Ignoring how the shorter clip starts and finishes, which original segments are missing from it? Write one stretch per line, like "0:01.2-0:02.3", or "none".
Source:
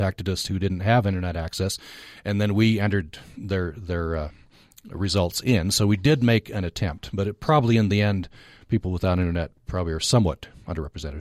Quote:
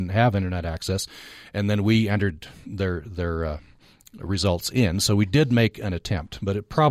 none